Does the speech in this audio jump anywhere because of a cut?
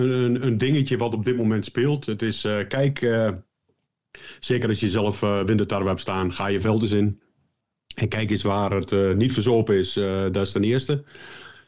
no; 0 cuts

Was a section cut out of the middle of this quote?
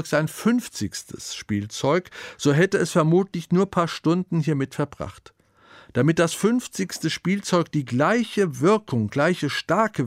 no; 0 cuts

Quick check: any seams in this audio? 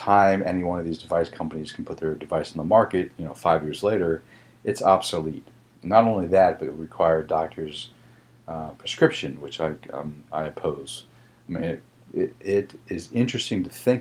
no; 0 cuts

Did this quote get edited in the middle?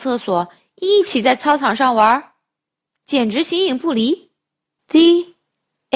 yes; 1 cut; at 4.8 s

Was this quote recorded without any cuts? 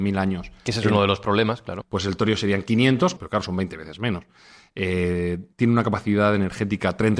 no; 3 cuts; at 1.8 s, 3.2 s, 5.5 s

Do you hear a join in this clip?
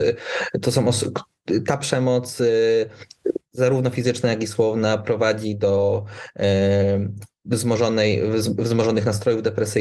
no; 0 cuts

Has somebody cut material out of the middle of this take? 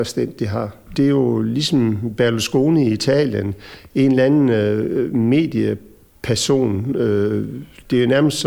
yes; 1 cut; at 0.9 s

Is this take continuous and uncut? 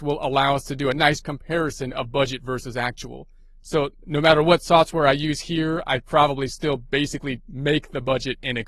yes; 0 cuts

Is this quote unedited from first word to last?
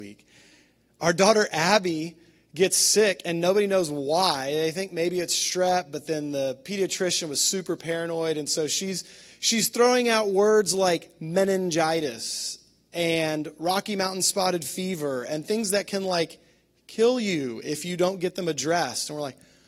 yes; 0 cuts

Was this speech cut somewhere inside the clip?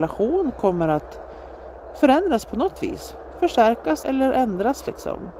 yes; 1 cut; at 4.0 s

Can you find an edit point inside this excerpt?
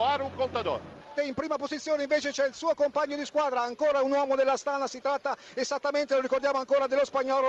yes; 1 cut; at 1.2 s

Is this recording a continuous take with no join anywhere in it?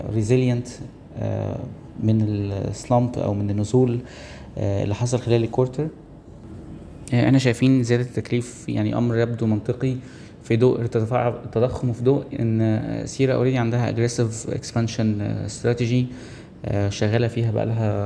yes; 0 cuts

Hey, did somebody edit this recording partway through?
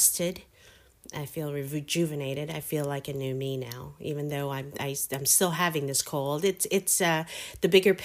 no; 0 cuts

